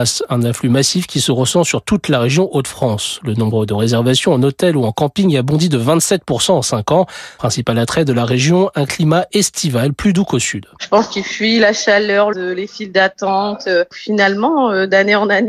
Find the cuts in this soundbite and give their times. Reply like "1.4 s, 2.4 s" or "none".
12.3 s